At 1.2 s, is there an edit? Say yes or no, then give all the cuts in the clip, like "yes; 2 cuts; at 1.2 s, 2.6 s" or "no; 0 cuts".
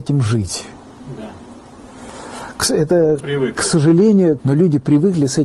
no; 2 cuts; at 3.2 s, 4.4 s